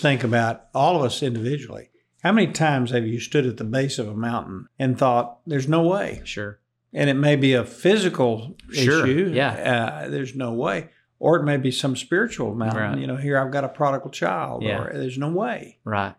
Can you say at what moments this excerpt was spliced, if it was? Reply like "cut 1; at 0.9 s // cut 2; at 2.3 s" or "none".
cut 1; at 4.7 s